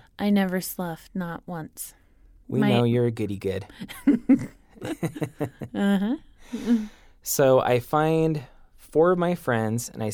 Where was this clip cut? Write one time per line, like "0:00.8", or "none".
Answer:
none